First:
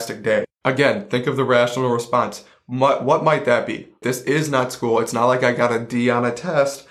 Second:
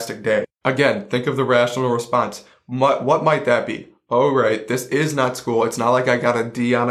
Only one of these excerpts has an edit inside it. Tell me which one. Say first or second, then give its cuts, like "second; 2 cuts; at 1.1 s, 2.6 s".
first; 1 cut; at 4.0 s